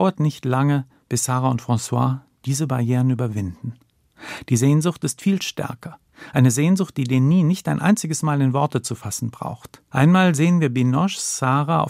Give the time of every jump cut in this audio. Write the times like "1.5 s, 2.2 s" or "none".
9.9 s